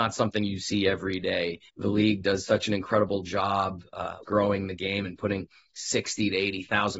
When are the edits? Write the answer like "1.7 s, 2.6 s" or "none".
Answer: 1.7 s, 4.2 s